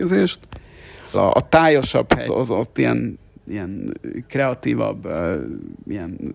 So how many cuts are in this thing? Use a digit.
2